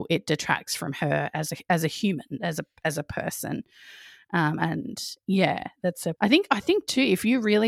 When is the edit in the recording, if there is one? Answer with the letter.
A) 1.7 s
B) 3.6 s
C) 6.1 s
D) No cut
C